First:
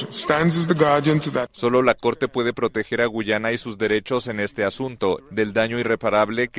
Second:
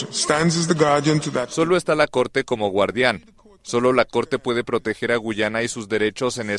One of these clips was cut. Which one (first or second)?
first